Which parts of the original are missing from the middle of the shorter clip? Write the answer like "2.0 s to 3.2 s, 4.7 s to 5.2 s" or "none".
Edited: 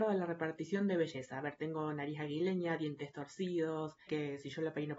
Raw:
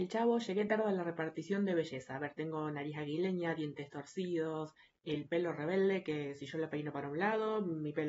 4.9 s to 6.0 s